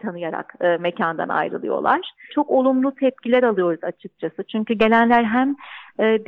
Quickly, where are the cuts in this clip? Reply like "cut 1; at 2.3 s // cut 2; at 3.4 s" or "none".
cut 1; at 2.3 s